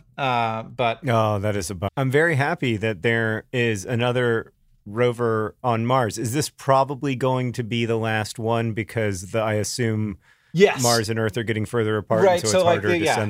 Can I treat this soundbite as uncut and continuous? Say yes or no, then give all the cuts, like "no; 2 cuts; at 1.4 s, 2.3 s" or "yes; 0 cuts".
no; 1 cut; at 1.9 s